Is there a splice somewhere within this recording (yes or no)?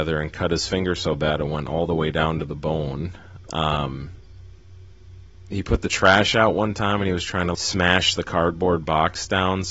yes